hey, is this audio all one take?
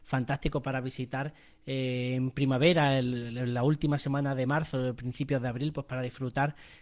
yes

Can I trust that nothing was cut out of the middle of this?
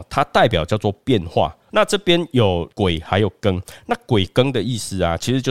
no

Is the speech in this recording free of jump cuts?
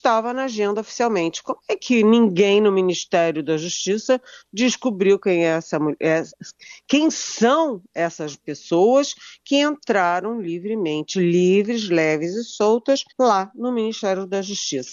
no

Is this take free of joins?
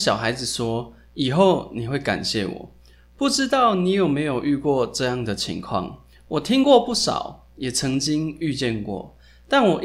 yes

